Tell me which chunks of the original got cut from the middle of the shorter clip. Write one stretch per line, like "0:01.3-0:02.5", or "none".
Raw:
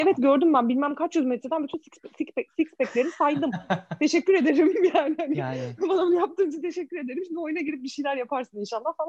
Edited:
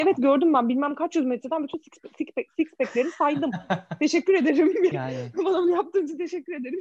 0:04.9-0:05.4